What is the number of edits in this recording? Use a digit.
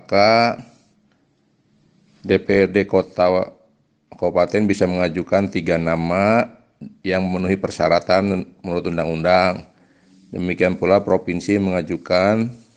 0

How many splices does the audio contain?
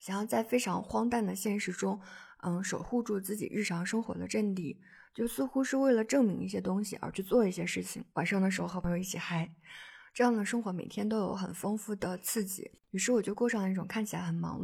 2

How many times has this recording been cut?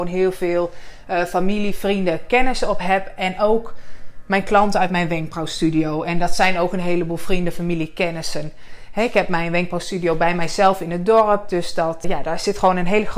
1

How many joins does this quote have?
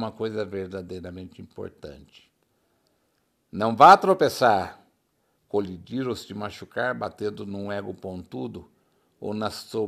0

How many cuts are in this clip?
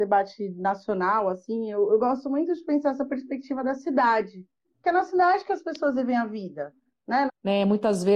1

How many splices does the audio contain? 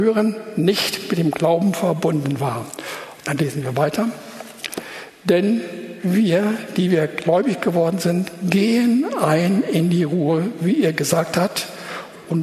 0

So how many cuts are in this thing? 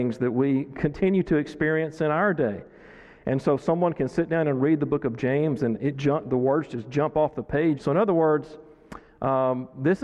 2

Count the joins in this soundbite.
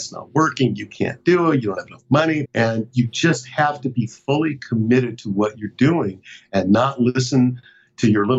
1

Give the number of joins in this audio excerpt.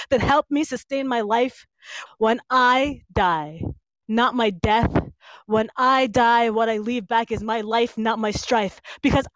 2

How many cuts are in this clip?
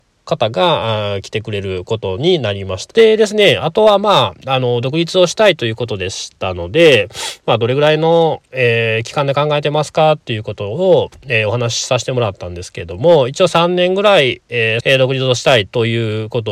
2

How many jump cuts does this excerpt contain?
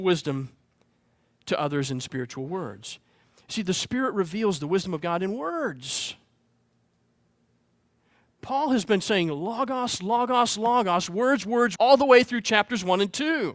1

